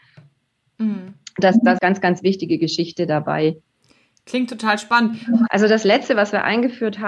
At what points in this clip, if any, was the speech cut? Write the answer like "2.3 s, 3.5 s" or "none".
1.8 s, 5.5 s